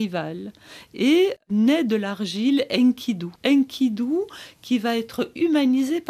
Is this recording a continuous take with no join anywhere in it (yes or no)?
no